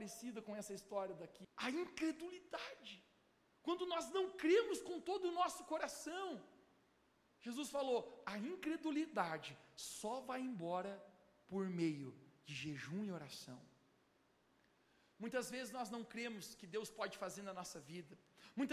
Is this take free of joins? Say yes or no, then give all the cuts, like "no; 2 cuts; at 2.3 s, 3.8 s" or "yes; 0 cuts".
no; 1 cut; at 1.4 s